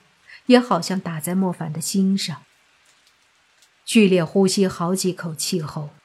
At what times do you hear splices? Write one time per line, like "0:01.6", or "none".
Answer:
none